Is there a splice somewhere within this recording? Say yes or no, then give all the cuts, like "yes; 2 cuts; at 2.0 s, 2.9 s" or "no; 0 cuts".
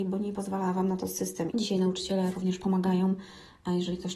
yes; 1 cut; at 1.5 s